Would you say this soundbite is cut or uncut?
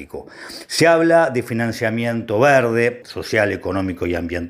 cut